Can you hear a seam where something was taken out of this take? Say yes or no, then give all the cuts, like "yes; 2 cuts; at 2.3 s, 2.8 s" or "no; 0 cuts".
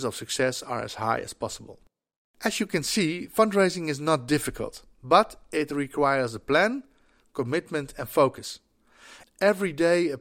yes; 1 cut; at 9.2 s